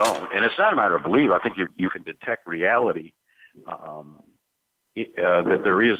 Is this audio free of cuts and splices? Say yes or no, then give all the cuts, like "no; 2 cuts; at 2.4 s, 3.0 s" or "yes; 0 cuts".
yes; 0 cuts